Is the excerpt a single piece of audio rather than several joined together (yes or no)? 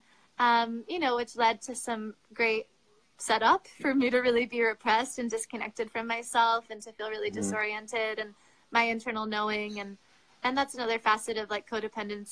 yes